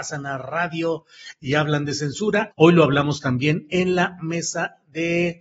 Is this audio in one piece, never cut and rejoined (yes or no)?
no